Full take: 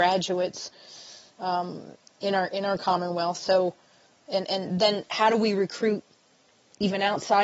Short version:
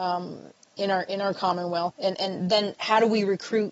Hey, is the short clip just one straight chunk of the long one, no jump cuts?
no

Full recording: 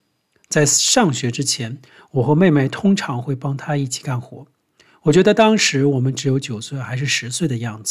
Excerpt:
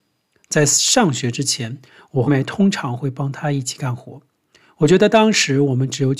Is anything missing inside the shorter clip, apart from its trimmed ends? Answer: yes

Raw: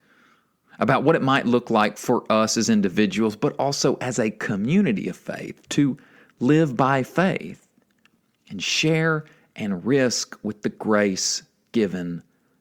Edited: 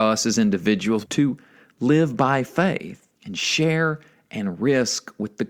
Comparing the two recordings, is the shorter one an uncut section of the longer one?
no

